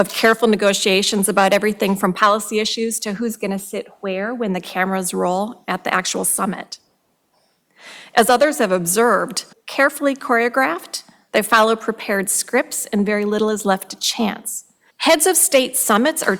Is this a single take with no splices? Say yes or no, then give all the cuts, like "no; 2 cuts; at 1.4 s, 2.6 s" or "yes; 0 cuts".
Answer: no; 2 cuts; at 9.5 s, 14.9 s